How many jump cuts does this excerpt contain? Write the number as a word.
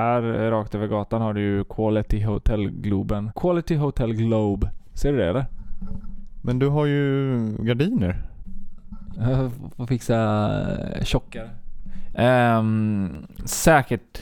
two